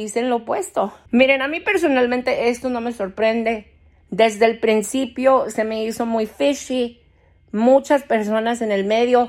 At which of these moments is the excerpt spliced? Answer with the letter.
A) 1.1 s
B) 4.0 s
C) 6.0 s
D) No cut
A